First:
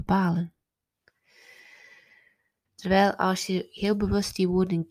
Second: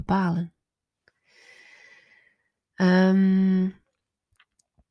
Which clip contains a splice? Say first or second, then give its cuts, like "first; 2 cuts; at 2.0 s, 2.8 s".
first; 1 cut; at 2.7 s